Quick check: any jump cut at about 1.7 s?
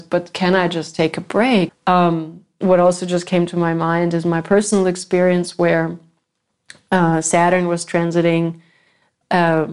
yes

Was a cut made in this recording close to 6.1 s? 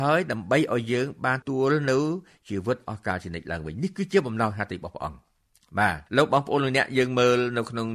yes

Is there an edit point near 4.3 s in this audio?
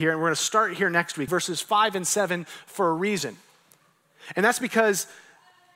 no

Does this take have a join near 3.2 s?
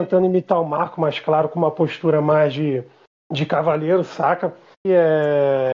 no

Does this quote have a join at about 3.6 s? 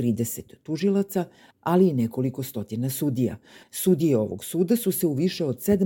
yes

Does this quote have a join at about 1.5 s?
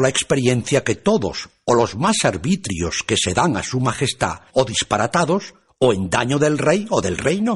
no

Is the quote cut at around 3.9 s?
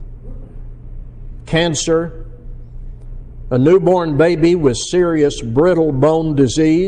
no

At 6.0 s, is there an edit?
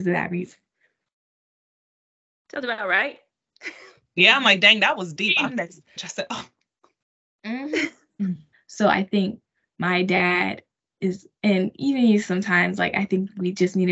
yes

